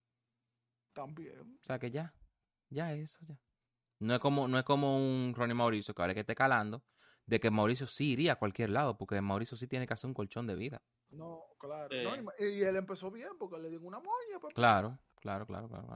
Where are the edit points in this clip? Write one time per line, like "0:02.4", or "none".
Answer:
none